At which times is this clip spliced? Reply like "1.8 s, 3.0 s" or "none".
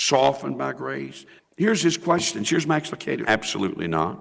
1.4 s, 3.2 s